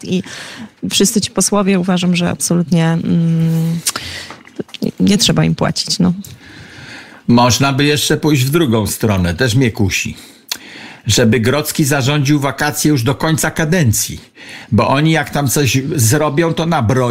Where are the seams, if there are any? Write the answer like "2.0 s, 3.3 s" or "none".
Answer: none